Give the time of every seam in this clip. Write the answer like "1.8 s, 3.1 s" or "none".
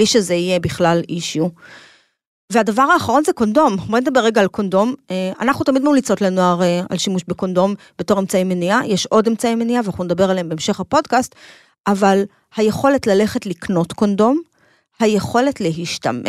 none